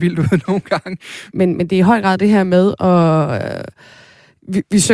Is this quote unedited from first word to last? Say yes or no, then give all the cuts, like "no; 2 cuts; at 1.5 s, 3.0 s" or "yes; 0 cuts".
no; 1 cut; at 1.3 s